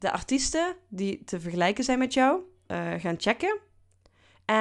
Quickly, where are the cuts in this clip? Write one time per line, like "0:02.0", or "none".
0:02.7